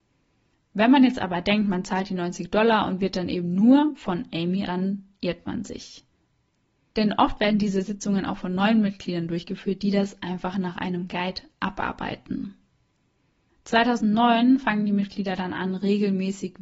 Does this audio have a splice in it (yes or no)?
yes